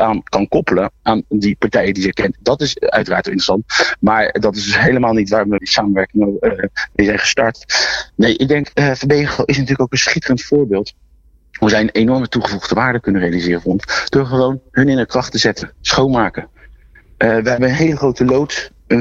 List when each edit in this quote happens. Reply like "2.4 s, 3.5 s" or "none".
5.6 s